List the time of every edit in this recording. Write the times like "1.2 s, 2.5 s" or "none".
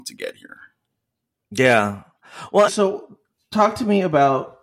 2.7 s